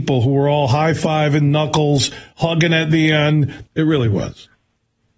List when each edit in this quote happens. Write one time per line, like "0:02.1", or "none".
0:03.7

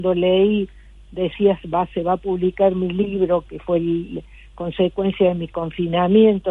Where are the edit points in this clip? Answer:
none

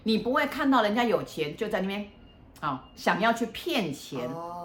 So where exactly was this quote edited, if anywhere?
none

